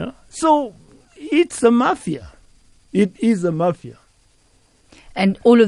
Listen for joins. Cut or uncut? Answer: uncut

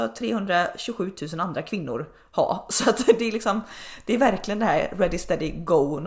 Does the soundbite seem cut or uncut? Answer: uncut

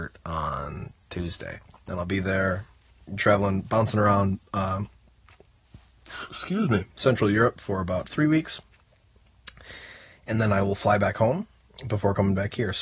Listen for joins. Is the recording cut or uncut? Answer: uncut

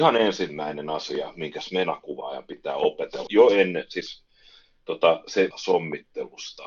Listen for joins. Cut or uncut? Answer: cut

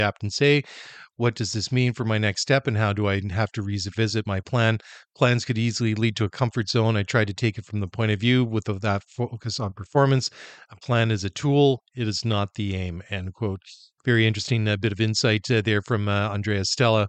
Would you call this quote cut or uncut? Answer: cut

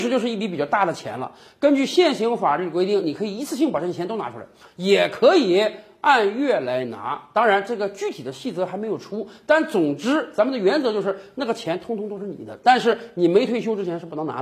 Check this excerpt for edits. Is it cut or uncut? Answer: uncut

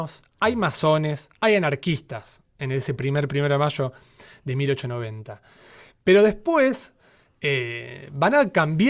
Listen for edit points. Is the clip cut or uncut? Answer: uncut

